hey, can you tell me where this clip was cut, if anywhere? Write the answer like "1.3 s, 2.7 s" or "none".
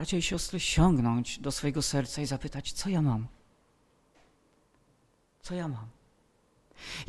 none